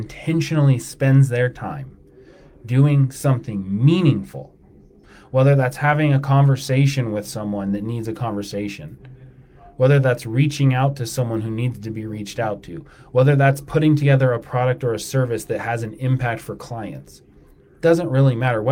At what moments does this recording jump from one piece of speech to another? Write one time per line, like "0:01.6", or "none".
none